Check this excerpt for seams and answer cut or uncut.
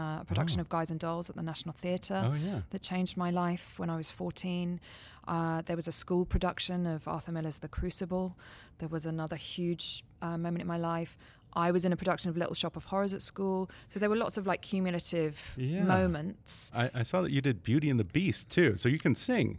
uncut